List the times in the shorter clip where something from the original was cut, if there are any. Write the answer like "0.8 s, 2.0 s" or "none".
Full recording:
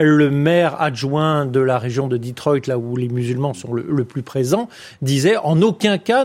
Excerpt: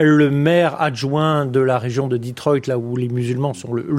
none

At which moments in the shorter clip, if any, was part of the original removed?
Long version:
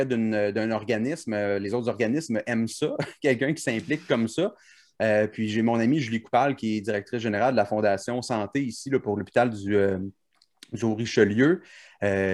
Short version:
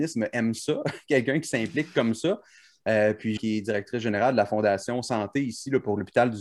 3.4 s

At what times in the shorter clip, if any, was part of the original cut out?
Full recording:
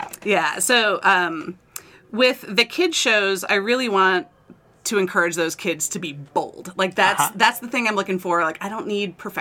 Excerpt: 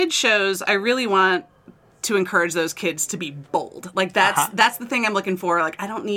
none

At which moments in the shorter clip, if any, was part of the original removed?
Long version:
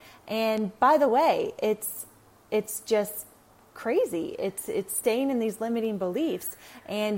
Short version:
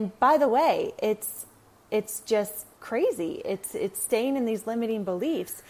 2.7 s

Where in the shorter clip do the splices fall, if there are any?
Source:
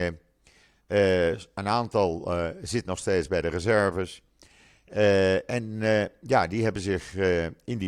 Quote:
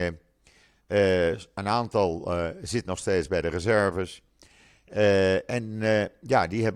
none

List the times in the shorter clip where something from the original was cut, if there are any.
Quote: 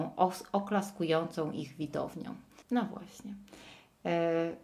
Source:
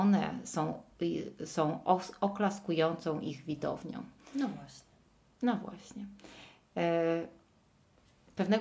2.6 s

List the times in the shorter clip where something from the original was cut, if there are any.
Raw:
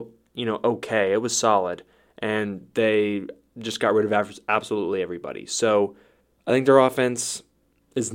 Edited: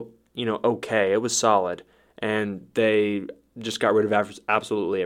none

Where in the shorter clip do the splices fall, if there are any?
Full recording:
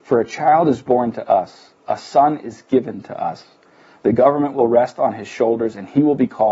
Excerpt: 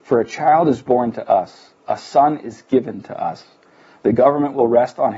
none

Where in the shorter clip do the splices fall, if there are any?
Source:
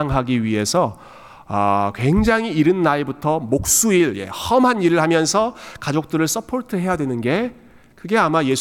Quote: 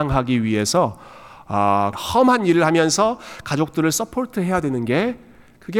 1.9 s

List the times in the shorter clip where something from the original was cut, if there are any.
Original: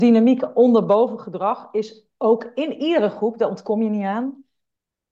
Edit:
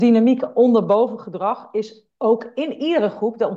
none

